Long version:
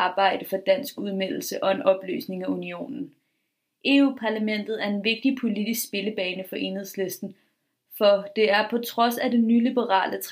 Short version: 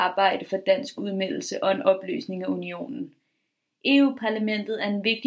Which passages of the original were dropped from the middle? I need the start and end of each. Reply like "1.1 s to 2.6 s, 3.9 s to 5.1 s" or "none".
none